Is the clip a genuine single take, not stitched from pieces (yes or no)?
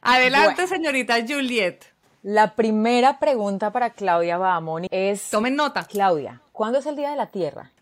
no